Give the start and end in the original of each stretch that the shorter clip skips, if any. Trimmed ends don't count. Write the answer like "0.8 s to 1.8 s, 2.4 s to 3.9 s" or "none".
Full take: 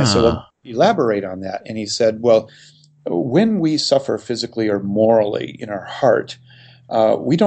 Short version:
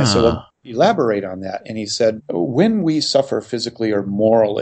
2.2 s to 3.0 s